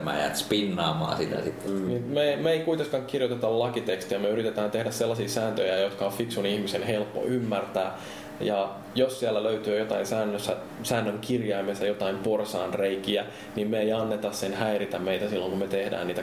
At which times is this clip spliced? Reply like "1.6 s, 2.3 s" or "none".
1.7 s